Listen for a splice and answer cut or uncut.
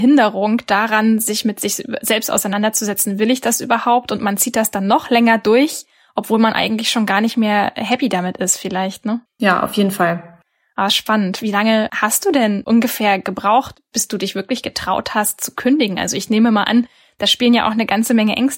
uncut